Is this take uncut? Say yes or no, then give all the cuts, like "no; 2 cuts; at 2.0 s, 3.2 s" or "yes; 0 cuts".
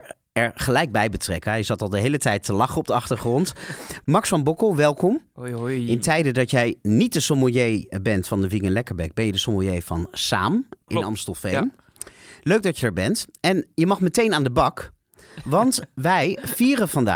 yes; 0 cuts